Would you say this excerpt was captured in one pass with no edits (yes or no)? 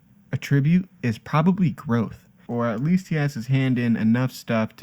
no